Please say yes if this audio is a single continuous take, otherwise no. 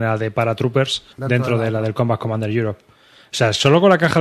no